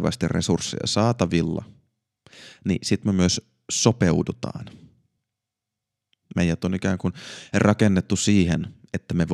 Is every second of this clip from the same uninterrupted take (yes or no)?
yes